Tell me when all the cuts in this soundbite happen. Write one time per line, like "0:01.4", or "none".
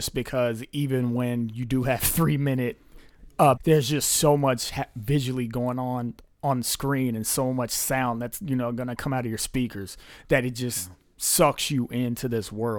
0:03.6